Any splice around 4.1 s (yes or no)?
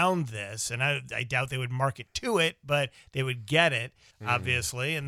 yes